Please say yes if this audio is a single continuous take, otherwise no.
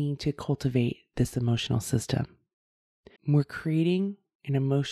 no